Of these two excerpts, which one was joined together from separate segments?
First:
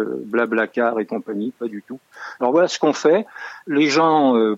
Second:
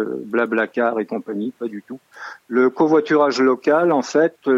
first; 1 cut; at 2.4 s

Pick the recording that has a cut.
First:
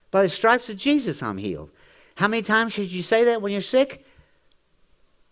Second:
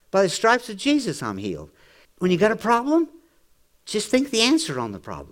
second; 1 cut; at 2.0 s

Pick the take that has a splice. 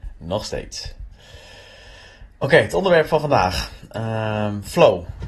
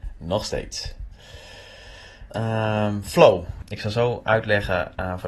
second; 2 cuts; at 2.3 s, 3.6 s

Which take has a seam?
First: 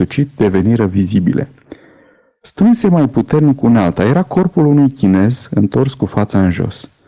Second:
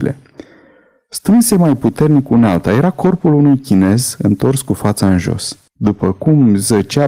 second; 1 cut; at 5.7 s

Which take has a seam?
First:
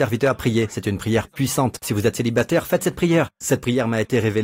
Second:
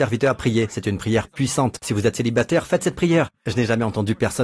second; 1 cut; at 3.3 s

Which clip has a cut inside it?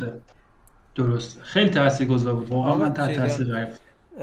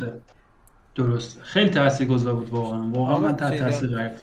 first; 1 cut; at 2.5 s

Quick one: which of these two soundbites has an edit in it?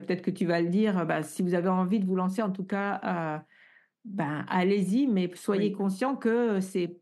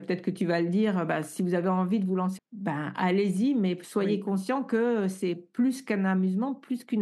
second; 1 cut; at 2.4 s

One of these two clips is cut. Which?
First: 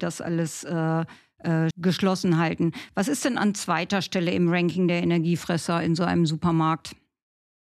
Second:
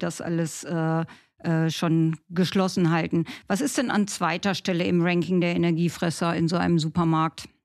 first; 1 cut; at 1.7 s

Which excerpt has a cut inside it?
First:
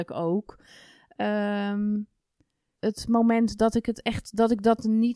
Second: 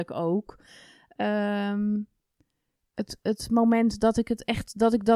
first; 1 cut; at 2.8 s

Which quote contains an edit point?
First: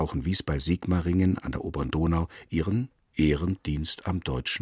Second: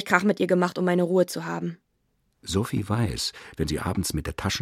second; 1 cut; at 3.6 s

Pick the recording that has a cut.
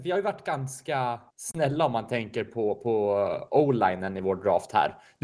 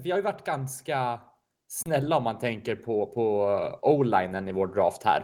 first; 1 cut; at 1.3 s

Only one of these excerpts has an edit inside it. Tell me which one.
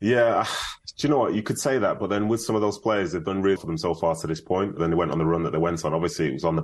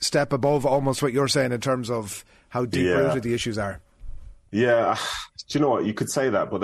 first; 2 cuts; at 3.6 s, 4.8 s

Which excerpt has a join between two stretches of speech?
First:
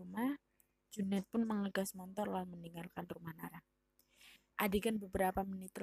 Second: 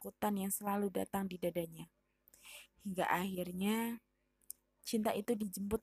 first; 1 cut; at 4.5 s

